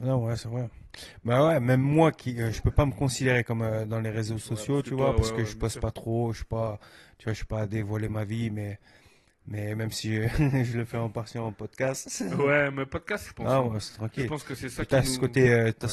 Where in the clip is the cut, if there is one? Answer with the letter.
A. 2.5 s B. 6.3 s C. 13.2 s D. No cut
C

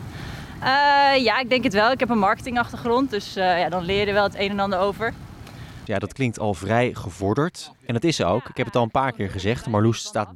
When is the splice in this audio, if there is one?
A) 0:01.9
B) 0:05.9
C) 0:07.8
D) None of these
B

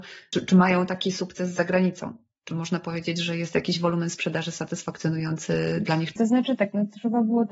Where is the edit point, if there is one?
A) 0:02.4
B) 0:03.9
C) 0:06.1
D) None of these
C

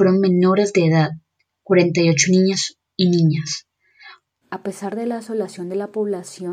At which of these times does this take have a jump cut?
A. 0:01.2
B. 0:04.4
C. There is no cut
B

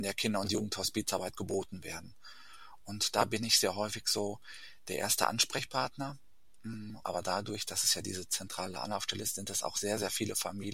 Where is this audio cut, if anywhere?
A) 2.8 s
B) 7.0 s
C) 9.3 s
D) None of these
B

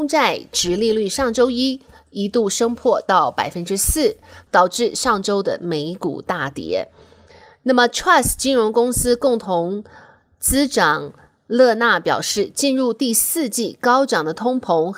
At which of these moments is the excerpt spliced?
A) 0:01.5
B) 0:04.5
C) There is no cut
B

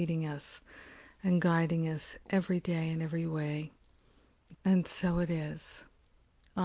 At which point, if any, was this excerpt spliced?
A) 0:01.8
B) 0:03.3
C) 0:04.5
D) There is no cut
C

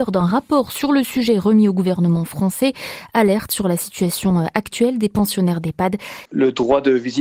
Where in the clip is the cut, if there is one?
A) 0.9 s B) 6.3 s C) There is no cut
B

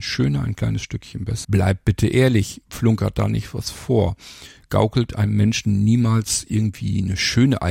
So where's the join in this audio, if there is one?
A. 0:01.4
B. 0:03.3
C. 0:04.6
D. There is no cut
A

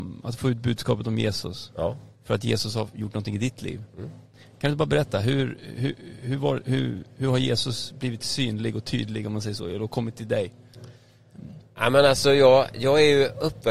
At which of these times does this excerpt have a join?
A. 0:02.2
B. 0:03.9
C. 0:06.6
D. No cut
D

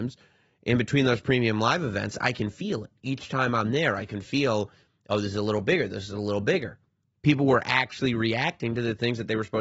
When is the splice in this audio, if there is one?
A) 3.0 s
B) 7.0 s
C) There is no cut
B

